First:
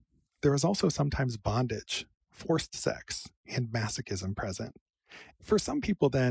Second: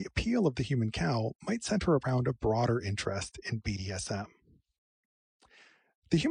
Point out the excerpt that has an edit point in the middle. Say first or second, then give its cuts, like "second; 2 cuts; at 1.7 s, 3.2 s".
first; 1 cut; at 5.3 s